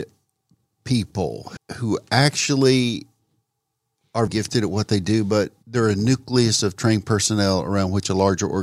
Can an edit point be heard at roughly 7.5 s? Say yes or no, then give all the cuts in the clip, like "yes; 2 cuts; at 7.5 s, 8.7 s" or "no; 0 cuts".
no; 3 cuts; at 1.6 s, 4.3 s, 5.6 s